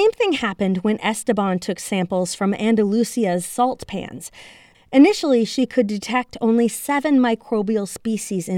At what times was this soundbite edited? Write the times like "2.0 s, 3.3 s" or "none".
4.7 s